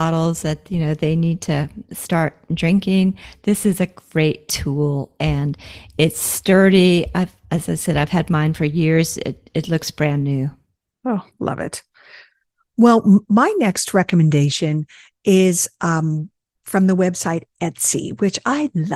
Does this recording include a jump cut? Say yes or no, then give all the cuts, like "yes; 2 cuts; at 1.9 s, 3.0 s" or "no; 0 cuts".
no; 0 cuts